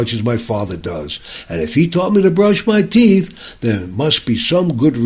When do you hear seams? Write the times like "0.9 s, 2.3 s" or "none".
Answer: none

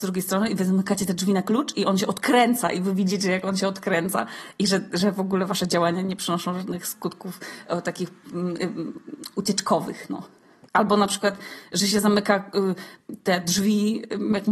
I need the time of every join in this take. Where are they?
10.7 s

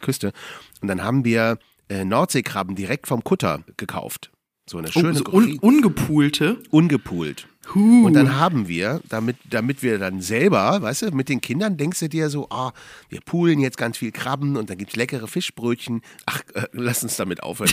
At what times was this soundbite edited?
16.2 s

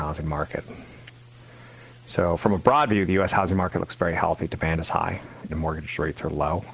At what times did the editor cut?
5.5 s

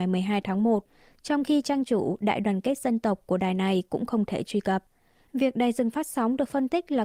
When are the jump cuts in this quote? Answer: 5.3 s

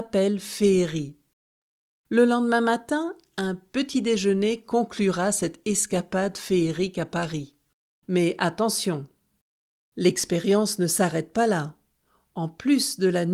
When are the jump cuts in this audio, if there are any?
1.9 s, 8.0 s

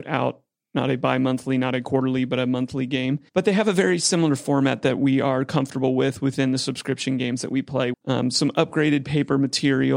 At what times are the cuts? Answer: 3.3 s, 7.9 s

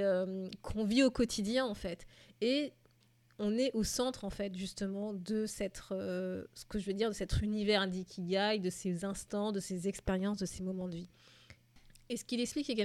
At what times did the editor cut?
none

